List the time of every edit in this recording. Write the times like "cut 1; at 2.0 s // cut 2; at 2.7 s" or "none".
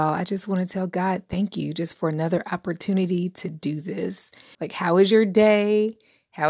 cut 1; at 4.5 s